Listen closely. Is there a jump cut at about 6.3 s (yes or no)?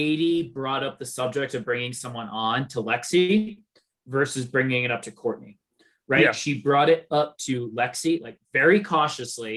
no